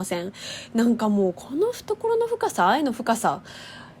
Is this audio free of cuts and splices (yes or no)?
yes